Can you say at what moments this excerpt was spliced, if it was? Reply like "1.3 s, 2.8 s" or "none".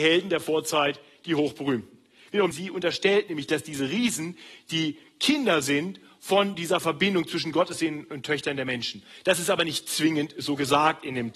2.5 s